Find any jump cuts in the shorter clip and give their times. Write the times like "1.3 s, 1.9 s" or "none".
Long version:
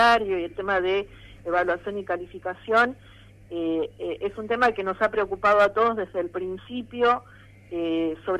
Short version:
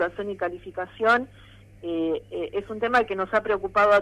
none